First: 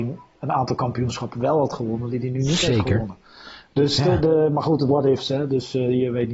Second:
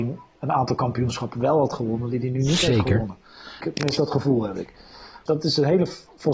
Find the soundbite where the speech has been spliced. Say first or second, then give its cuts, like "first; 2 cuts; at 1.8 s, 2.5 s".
second; 2 cuts; at 3.6 s, 5.3 s